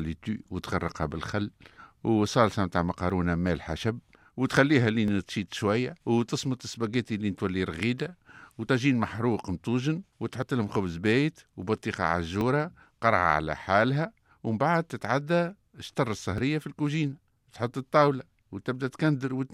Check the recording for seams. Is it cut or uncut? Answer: cut